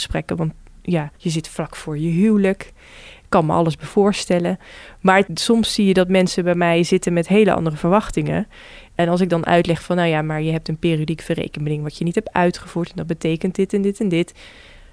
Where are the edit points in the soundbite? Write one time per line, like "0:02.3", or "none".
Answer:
0:01.2